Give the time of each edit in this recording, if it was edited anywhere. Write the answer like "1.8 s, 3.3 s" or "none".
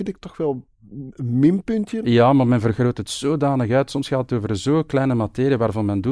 2.0 s